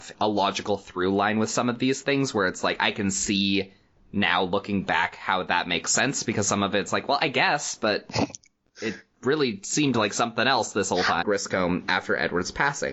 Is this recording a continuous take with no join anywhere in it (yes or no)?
no